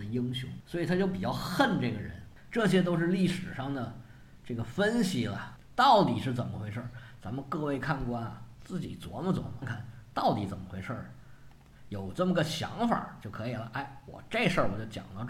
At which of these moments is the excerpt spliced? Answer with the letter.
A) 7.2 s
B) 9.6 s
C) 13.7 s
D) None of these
B